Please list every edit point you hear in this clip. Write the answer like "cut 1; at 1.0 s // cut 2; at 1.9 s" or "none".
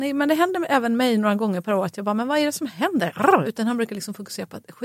cut 1; at 3.4 s